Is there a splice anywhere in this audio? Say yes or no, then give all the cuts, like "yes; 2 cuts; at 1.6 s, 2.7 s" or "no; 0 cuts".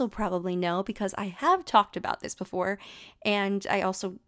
no; 0 cuts